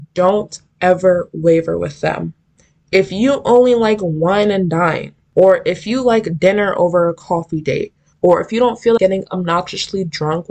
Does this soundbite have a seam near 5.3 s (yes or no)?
no